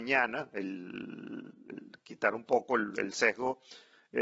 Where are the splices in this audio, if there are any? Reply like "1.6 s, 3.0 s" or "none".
none